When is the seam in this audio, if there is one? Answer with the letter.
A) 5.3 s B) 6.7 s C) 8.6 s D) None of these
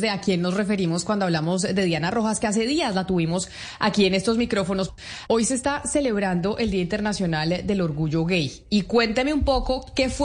D